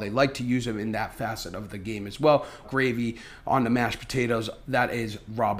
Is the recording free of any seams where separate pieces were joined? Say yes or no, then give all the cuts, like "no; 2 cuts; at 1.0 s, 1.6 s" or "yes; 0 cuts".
no; 1 cut; at 2.6 s